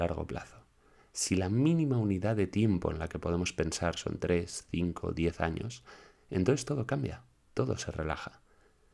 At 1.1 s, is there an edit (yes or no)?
no